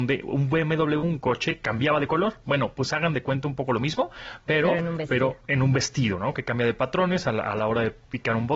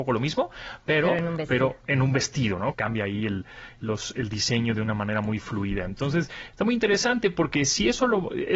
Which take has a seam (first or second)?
second